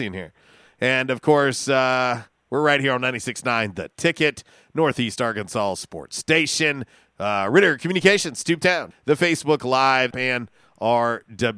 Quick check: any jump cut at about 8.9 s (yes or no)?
yes